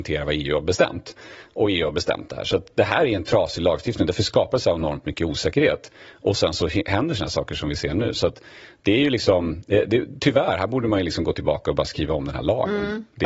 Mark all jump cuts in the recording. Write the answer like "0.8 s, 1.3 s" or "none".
none